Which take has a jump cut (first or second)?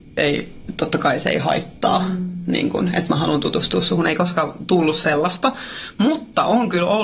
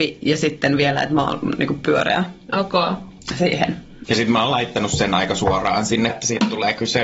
second